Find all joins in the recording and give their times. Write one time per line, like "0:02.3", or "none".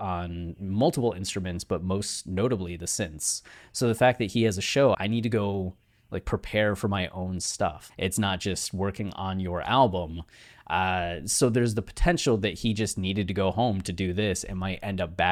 0:04.9
0:07.9